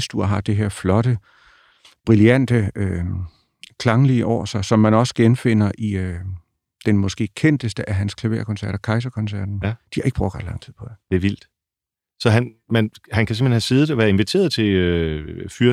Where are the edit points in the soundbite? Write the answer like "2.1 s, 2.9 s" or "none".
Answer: 9.6 s